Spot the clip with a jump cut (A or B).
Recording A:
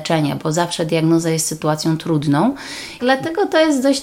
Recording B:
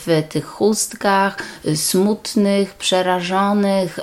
A